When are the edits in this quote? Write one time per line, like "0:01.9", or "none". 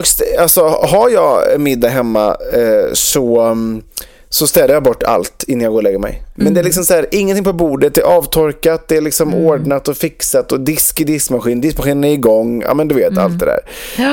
0:06.4

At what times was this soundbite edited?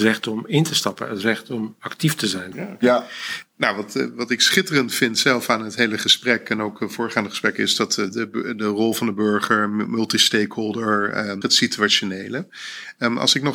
0:02.5
0:11.4

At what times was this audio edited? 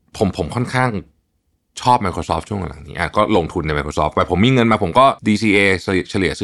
0:05.2

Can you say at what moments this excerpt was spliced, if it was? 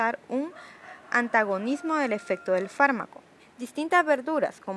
0:03.4

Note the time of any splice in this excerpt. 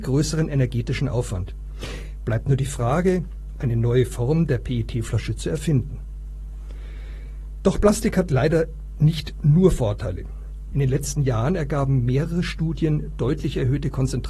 0:03.6
0:10.7

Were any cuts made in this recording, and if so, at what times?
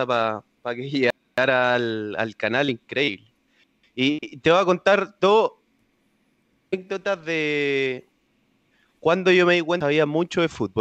none

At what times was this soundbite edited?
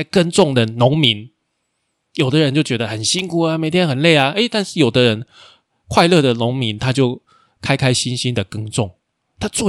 none

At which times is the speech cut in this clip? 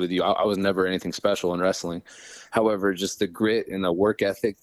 0:03.2

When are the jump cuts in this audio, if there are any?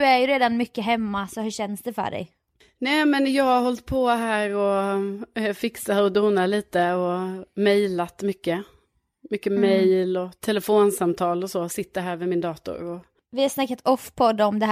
none

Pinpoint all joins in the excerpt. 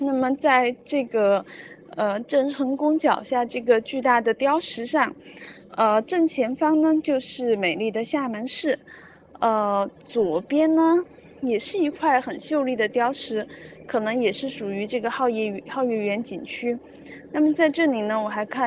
none

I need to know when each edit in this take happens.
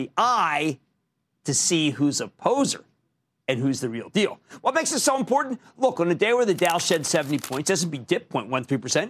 none

